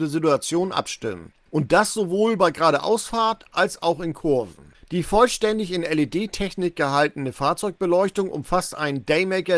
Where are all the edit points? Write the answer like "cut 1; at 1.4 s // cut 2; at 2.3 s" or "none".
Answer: cut 1; at 1.5 s // cut 2; at 4.7 s